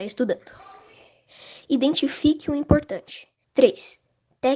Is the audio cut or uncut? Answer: cut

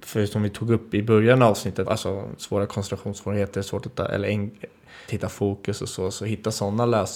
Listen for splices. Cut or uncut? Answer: cut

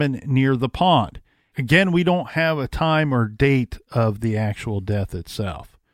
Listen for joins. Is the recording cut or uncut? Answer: cut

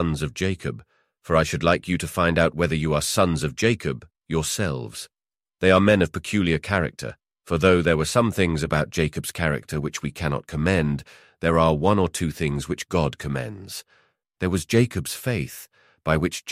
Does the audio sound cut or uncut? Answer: uncut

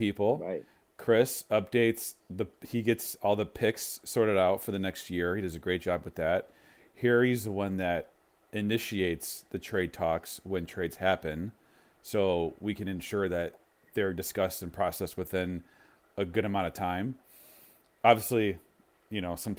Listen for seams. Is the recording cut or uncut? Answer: uncut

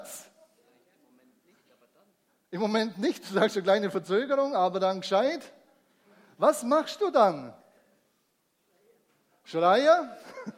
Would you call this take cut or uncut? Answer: uncut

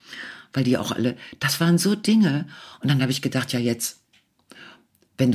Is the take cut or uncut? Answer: uncut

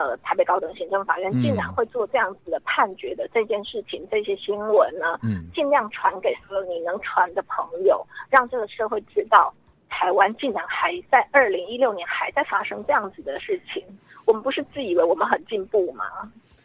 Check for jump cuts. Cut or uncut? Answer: uncut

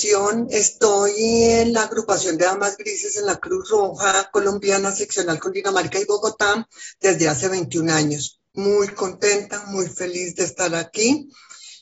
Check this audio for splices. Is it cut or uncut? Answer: uncut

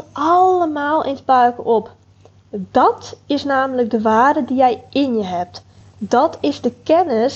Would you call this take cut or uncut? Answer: uncut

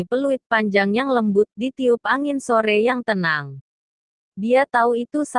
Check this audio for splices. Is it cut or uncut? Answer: uncut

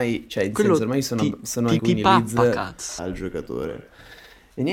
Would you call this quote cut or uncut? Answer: cut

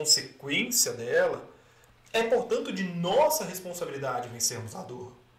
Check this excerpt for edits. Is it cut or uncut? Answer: uncut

